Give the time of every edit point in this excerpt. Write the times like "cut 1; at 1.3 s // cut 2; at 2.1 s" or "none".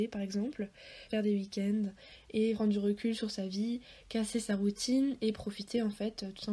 cut 1; at 1.1 s // cut 2; at 2.5 s